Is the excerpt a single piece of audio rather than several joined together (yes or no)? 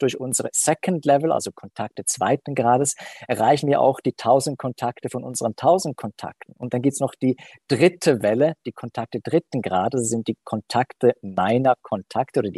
yes